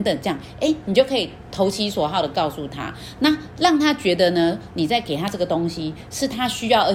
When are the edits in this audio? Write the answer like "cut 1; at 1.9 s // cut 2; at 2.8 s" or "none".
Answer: none

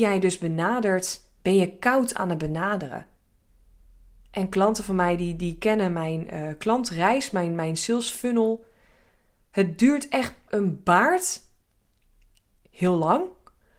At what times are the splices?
none

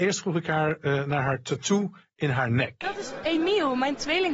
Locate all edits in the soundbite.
none

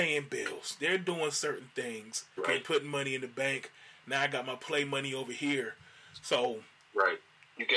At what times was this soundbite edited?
cut 1; at 2.4 s

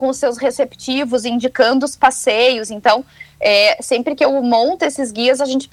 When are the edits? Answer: none

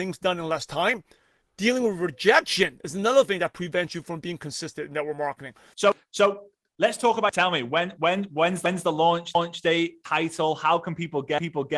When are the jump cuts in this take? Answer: cut 1; at 5.7 s

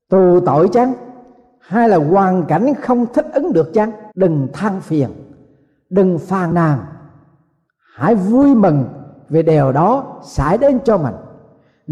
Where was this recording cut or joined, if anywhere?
cut 1; at 4.1 s

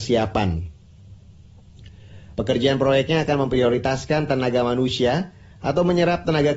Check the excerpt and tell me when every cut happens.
cut 1; at 2.3 s

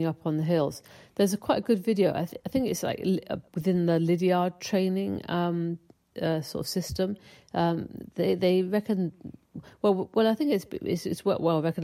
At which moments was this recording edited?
none

